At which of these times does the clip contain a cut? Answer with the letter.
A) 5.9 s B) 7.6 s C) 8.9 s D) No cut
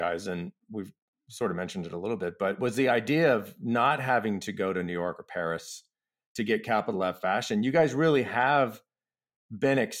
D